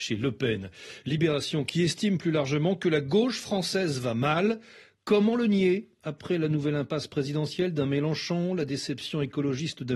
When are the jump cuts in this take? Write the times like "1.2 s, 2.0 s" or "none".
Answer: none